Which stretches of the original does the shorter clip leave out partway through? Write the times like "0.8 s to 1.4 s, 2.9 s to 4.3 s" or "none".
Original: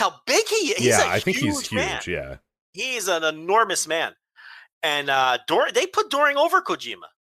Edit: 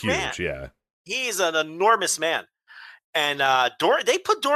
none